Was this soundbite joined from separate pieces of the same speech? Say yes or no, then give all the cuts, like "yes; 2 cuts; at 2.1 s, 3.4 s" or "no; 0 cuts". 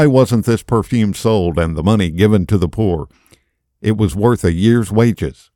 no; 0 cuts